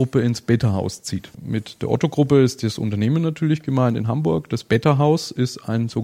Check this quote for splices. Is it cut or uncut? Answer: cut